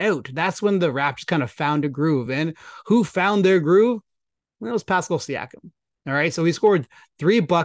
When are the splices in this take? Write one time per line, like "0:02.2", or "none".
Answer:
none